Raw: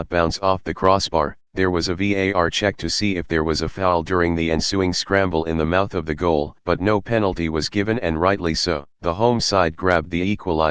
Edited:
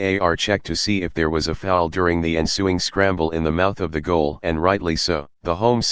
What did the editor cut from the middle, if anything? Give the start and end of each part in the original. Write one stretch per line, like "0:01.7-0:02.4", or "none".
0:06.6-0:08.0